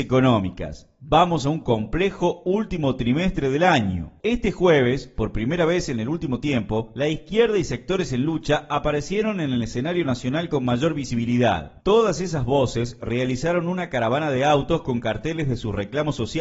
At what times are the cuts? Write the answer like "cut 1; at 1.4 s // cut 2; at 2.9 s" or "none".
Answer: cut 1; at 4.2 s // cut 2; at 11.8 s